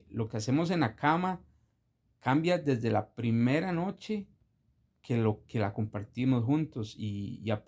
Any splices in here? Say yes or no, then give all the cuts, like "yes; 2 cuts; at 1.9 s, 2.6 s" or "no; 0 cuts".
no; 0 cuts